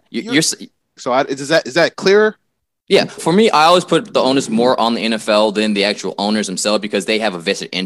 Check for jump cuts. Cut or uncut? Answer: cut